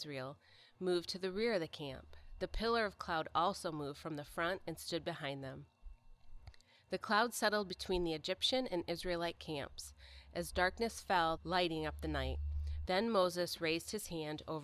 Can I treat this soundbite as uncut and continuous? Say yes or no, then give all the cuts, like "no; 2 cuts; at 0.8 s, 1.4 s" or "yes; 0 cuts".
no; 2 cuts; at 11.4 s, 12.8 s